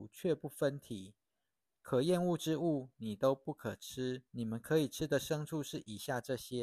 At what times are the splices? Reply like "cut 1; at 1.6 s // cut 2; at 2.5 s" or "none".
cut 1; at 1.7 s // cut 2; at 4.3 s